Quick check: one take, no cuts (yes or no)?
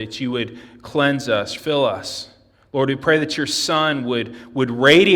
no